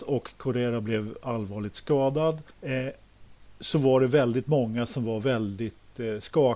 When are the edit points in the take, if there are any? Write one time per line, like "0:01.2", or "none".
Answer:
0:02.5